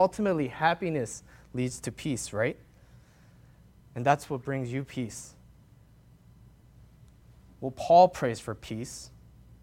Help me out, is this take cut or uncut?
uncut